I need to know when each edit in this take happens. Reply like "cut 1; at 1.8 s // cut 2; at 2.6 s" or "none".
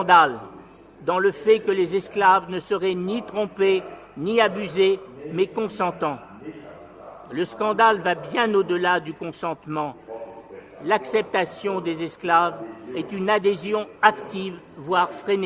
none